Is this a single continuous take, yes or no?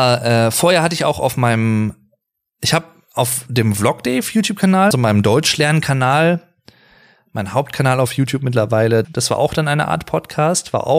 no